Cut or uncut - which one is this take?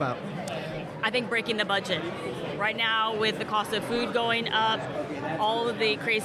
uncut